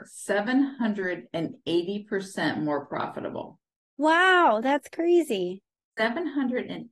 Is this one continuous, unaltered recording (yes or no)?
yes